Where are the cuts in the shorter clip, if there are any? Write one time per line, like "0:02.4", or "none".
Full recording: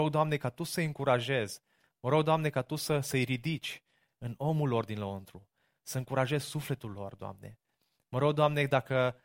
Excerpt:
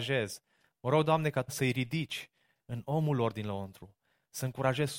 0:01.5